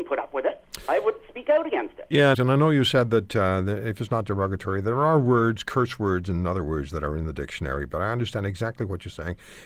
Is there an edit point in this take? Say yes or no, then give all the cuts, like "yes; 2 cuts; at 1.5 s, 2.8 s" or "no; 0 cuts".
yes; 1 cut; at 2.3 s